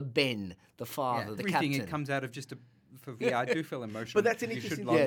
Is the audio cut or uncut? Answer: cut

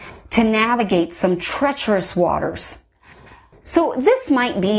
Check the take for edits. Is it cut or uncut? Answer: cut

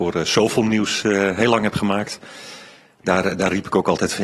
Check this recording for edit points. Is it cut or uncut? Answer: uncut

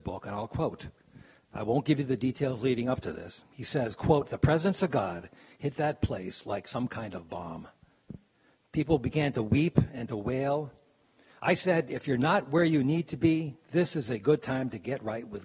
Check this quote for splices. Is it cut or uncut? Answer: uncut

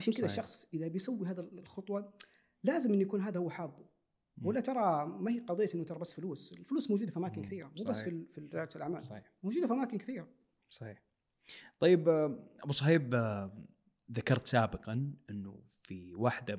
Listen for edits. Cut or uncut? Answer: uncut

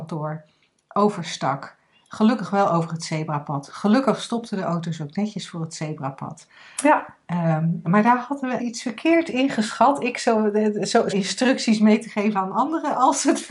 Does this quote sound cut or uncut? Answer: cut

